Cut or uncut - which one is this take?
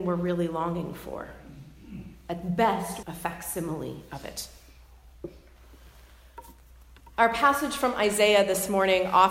cut